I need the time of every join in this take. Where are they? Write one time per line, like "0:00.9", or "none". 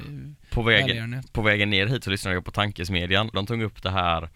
0:03.3